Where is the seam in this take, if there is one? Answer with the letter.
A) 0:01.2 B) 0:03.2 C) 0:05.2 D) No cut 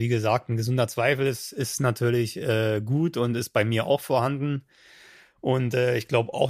D